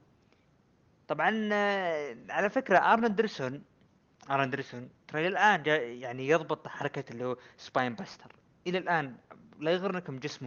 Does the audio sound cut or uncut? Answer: uncut